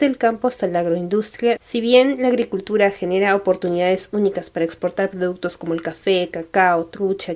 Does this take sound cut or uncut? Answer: cut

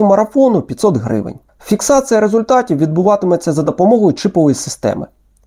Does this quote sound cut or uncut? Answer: cut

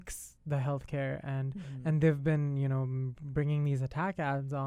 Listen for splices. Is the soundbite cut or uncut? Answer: uncut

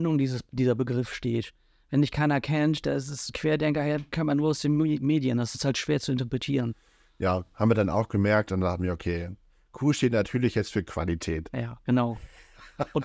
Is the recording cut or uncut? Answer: uncut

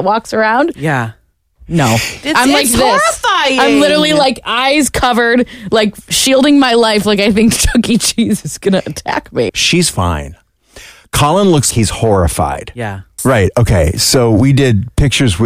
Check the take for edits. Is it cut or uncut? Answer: cut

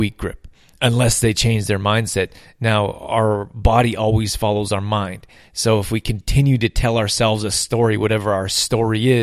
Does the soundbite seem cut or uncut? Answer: uncut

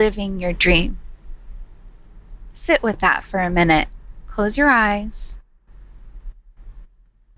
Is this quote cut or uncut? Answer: uncut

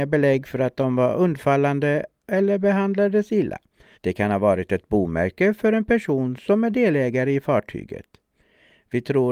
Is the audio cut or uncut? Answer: cut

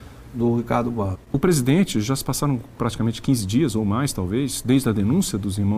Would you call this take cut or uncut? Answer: cut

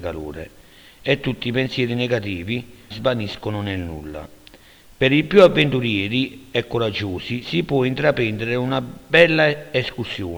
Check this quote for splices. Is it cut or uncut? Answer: cut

